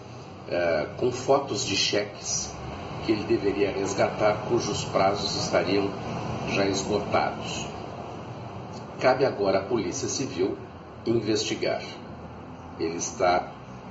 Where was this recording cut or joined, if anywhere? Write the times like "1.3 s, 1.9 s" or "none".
none